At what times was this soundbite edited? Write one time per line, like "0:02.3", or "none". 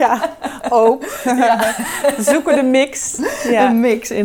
none